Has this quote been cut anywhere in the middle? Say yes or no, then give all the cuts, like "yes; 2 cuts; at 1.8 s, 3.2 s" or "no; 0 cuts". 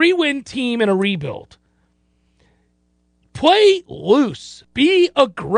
yes; 1 cut; at 4.6 s